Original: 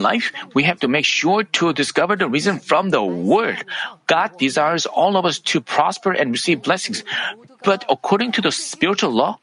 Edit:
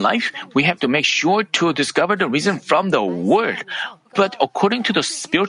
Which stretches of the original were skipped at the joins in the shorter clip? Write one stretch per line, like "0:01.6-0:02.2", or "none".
0:04.1-0:07.5